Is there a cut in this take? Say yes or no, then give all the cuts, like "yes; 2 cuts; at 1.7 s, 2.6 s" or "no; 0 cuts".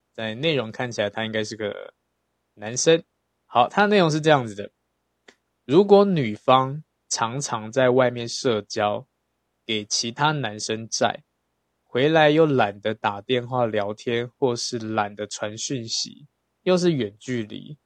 no; 0 cuts